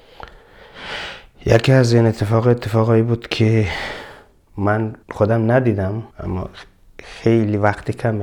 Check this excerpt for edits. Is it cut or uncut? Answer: cut